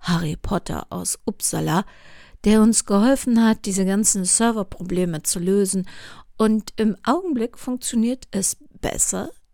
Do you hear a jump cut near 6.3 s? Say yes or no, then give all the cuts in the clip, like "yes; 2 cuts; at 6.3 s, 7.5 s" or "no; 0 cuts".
no; 0 cuts